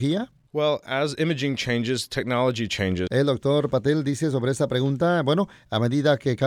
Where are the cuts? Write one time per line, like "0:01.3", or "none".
0:03.1